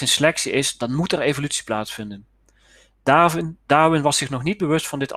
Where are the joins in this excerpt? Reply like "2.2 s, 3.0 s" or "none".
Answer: none